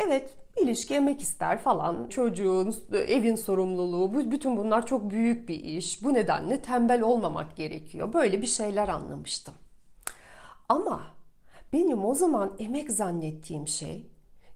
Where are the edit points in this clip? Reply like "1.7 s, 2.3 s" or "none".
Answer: 2.1 s